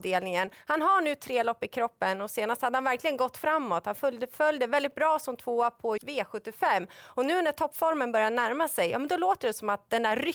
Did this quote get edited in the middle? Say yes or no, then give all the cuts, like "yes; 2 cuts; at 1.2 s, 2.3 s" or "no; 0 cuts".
yes; 1 cut; at 6.0 s